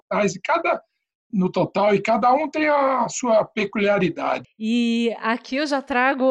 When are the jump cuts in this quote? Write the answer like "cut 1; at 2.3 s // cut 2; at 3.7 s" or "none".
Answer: cut 1; at 4.4 s